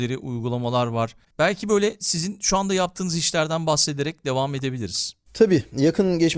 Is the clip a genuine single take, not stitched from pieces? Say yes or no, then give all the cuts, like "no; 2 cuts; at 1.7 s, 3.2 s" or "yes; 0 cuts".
no; 1 cut; at 1.3 s